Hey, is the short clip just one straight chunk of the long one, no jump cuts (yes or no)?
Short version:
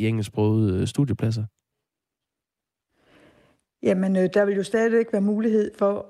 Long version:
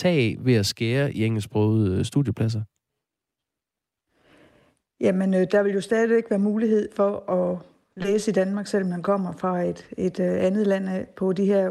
yes